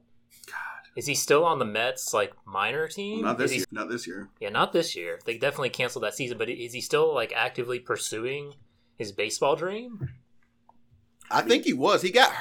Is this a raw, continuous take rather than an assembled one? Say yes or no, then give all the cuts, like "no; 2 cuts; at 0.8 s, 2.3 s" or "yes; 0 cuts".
no; 1 cut; at 3.6 s